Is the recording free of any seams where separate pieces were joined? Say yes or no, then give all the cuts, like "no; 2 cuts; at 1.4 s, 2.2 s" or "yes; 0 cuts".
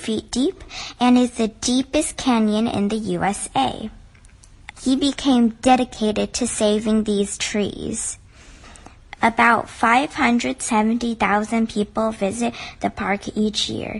no; 2 cuts; at 4.7 s, 9.2 s